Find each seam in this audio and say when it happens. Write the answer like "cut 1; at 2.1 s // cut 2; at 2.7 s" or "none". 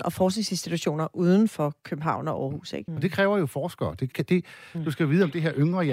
cut 1; at 2.9 s // cut 2; at 4.1 s